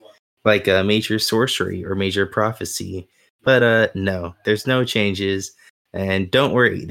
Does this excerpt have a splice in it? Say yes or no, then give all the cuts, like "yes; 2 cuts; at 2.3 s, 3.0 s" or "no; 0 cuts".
no; 0 cuts